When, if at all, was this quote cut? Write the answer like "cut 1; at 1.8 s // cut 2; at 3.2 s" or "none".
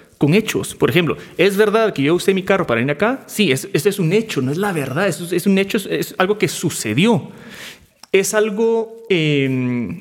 none